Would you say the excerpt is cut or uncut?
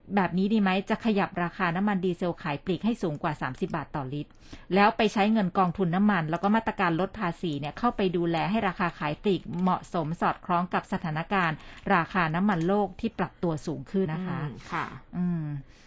cut